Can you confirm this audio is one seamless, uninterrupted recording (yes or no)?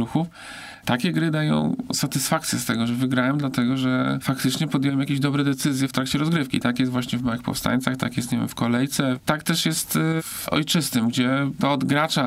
yes